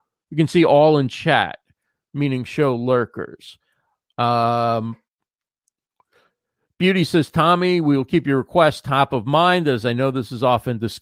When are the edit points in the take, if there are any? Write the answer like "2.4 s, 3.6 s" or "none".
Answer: 4.1 s